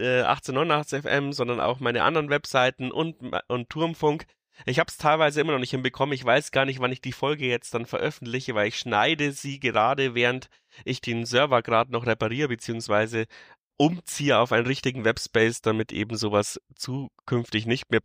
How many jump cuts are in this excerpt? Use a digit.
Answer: 0